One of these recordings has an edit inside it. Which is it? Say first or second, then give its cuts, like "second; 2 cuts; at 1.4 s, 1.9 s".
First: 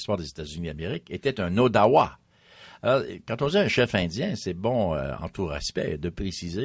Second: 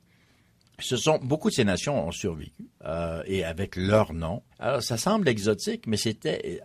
second; 2 cuts; at 2.8 s, 4.5 s